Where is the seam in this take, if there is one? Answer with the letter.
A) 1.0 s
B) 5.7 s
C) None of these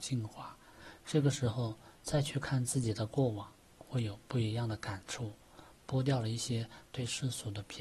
C